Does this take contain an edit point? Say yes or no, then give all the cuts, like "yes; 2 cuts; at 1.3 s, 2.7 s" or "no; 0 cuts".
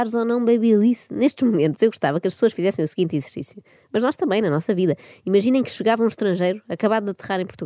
no; 0 cuts